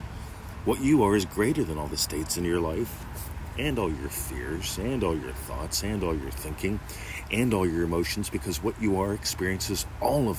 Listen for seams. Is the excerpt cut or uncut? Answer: uncut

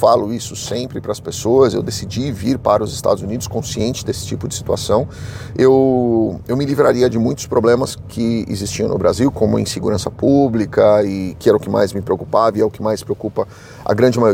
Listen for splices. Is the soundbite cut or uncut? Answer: uncut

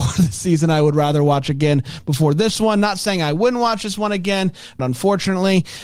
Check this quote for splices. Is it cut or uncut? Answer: cut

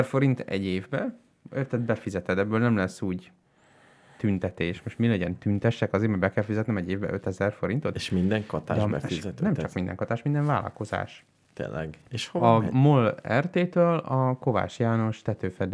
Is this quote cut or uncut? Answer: uncut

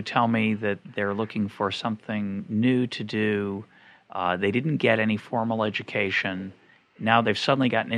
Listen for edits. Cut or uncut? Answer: uncut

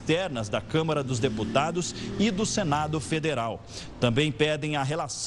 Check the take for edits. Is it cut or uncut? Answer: uncut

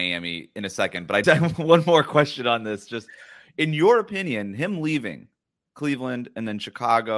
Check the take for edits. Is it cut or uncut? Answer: cut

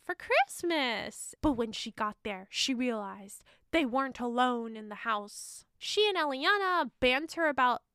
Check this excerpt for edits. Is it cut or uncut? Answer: cut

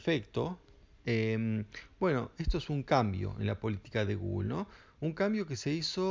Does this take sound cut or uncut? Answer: uncut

